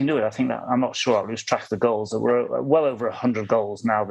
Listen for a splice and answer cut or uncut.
uncut